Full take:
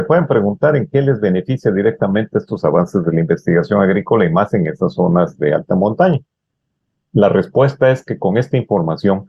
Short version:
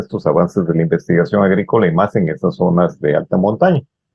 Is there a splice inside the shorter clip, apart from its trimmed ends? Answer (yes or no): no